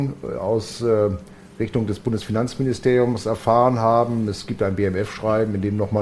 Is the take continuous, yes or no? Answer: yes